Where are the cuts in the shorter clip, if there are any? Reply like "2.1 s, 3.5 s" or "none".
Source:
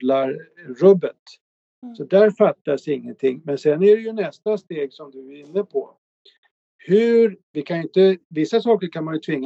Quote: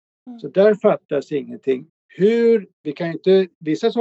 1.9 s